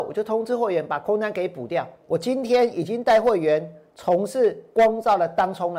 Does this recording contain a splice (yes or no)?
yes